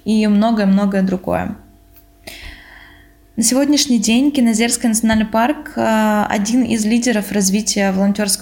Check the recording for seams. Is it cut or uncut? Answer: uncut